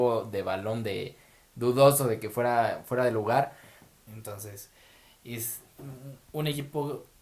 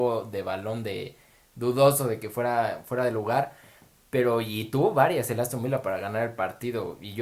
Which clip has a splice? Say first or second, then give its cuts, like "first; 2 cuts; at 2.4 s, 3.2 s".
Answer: first; 1 cut; at 4.1 s